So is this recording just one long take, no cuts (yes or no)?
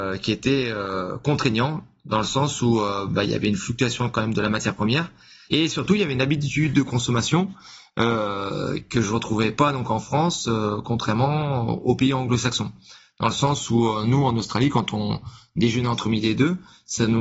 no